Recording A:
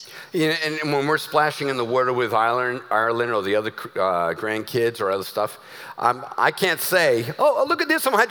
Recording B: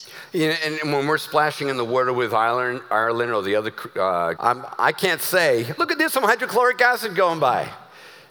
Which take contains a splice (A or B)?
B